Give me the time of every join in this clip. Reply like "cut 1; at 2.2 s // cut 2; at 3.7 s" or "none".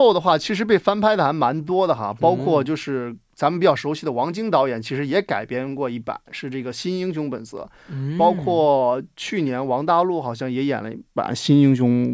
none